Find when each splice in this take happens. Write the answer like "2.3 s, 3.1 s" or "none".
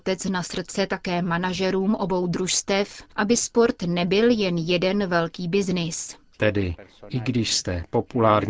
6.3 s